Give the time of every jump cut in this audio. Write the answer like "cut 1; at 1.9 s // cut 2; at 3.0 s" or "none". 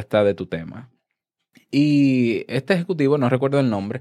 cut 1; at 1.5 s